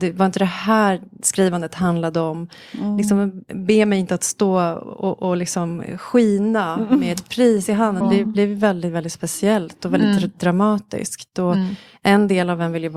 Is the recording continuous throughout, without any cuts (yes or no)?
no